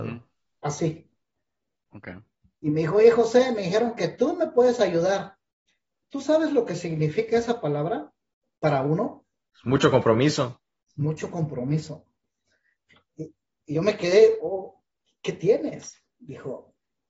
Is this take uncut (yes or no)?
yes